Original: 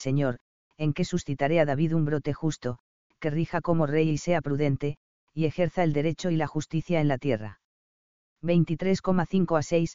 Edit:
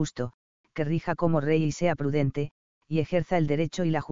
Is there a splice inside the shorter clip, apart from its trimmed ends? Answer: no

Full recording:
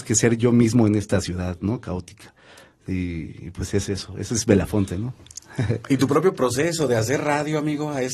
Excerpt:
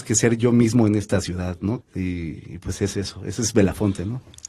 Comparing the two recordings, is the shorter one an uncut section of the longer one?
no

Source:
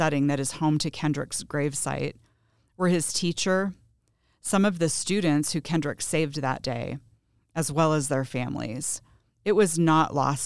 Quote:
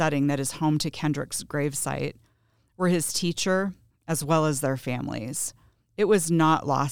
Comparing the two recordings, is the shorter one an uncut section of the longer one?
no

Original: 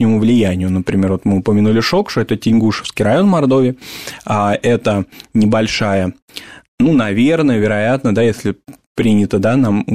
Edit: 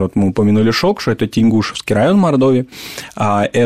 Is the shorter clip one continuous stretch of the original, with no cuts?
yes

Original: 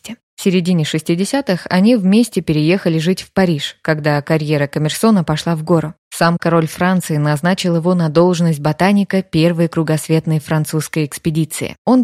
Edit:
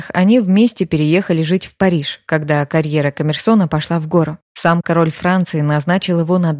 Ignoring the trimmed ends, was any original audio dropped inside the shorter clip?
no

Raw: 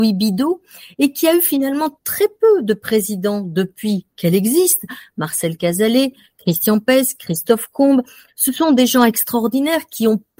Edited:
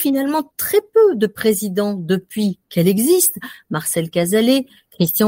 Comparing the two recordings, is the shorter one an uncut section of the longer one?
yes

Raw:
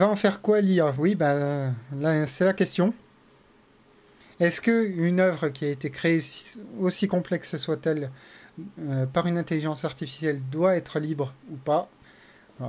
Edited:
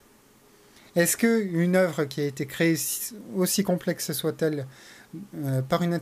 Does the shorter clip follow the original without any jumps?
yes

